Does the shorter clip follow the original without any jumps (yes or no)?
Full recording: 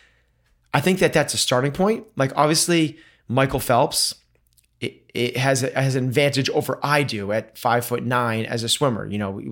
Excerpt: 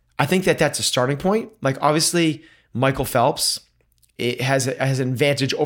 no